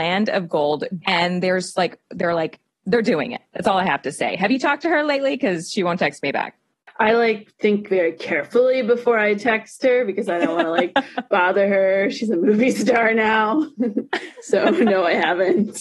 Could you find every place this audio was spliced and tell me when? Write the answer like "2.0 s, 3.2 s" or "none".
1.0 s